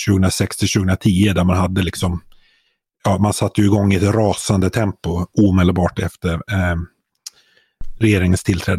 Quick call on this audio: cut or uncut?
uncut